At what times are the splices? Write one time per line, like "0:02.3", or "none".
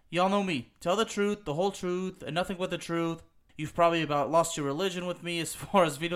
0:03.5